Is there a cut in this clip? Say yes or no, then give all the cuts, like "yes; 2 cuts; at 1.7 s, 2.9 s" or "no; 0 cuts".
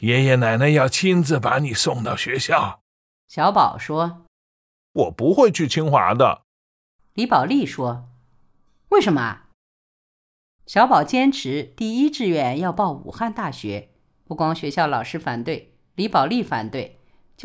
yes; 1 cut; at 9.5 s